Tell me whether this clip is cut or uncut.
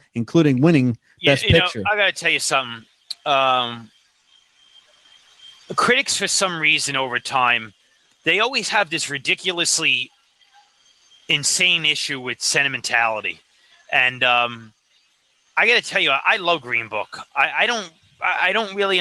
uncut